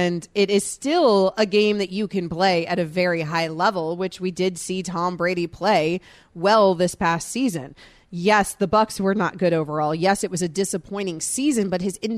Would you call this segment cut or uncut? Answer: uncut